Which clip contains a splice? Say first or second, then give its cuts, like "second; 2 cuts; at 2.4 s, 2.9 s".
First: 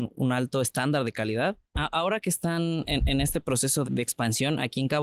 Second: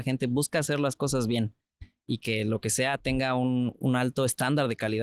first; 2 cuts; at 1.7 s, 3.8 s